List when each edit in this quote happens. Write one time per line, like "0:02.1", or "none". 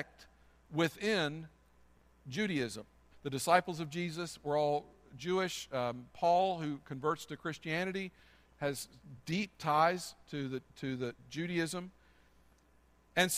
0:03.1